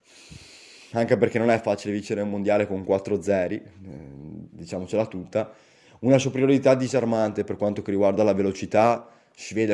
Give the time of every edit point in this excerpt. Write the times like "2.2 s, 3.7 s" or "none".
none